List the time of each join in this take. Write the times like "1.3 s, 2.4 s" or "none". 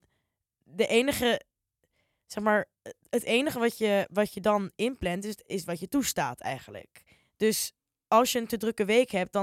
none

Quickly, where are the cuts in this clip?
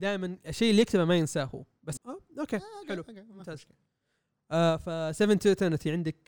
2.0 s

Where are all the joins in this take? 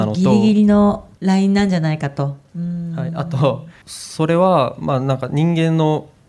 3.8 s

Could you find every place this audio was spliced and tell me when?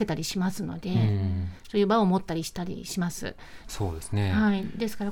3.6 s

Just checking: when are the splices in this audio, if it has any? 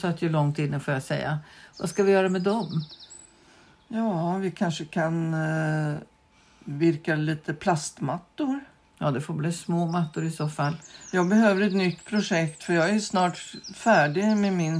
1.7 s

